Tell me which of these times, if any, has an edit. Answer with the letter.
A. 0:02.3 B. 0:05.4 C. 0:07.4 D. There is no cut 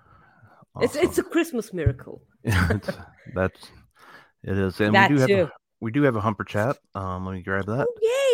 D